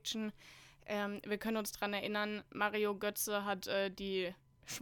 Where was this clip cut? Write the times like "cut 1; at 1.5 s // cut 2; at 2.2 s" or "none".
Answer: none